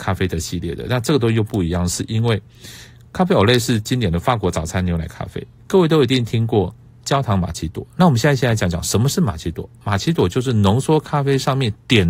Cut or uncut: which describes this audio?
cut